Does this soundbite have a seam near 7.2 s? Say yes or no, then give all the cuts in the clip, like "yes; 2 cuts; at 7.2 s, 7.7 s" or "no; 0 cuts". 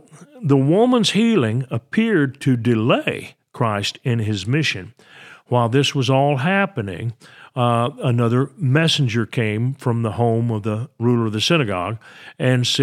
no; 0 cuts